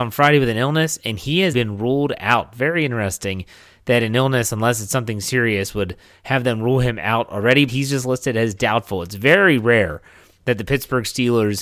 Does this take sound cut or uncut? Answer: cut